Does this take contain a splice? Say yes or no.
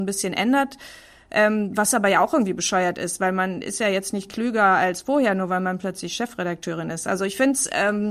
no